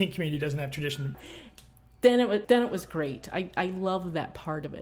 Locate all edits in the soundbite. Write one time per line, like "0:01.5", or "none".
0:01.1
0:02.4